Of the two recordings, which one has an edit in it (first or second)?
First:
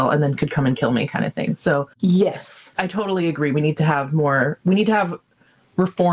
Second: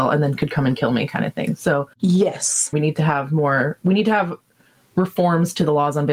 second